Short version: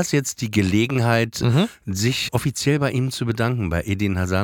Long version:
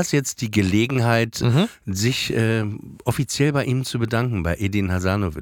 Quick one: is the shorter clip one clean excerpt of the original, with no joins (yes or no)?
no